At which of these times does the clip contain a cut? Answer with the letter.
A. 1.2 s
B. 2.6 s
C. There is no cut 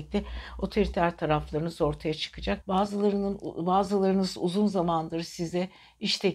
B